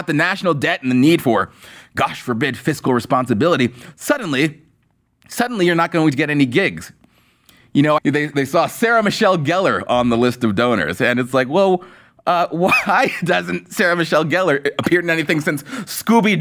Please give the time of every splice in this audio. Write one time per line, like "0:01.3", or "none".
0:08.0